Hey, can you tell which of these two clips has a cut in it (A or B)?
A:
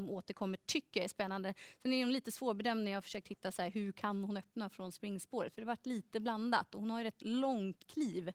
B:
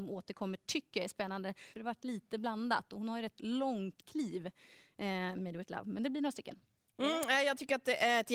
B